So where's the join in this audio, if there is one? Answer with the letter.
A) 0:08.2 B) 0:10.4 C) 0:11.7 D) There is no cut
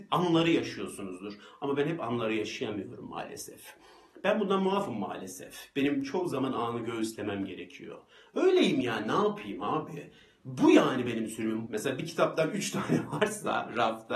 C